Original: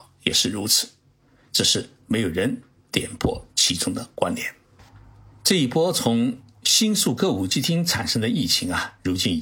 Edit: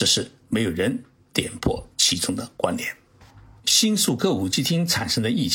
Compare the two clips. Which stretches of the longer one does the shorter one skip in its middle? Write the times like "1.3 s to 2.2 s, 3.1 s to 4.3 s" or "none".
5.2 s to 6.6 s